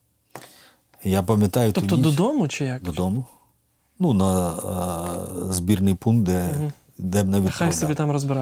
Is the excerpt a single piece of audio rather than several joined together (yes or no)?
yes